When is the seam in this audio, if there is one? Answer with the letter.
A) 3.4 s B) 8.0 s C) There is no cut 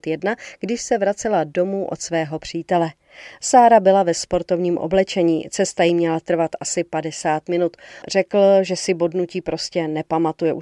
B